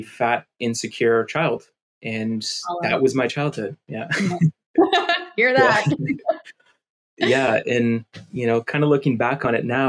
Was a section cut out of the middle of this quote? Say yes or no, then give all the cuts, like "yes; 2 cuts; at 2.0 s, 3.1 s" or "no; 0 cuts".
no; 0 cuts